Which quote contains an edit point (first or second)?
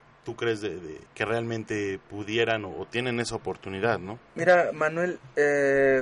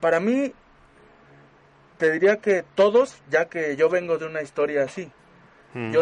first